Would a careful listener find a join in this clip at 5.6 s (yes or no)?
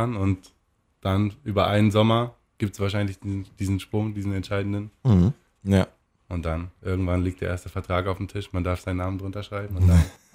yes